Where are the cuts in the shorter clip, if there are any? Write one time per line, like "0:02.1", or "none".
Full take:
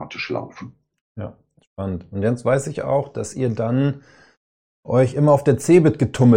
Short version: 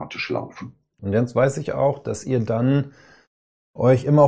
0:01.0